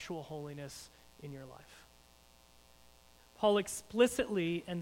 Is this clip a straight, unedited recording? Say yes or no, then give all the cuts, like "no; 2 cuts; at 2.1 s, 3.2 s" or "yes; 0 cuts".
no; 1 cut; at 3.2 s